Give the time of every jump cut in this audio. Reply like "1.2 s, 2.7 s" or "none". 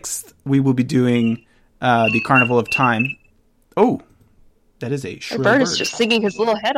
none